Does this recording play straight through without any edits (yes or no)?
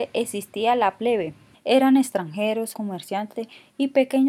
no